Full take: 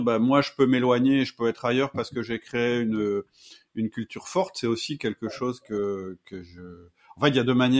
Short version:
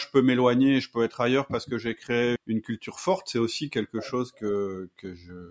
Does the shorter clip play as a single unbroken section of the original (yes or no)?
no